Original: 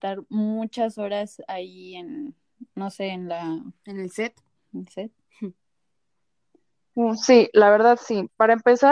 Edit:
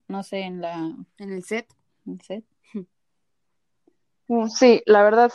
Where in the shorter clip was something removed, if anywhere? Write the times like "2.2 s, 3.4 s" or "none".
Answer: none